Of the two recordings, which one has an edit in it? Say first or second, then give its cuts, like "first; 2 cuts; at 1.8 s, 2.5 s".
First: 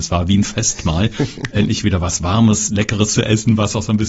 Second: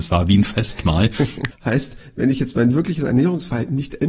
second; 1 cut; at 1.5 s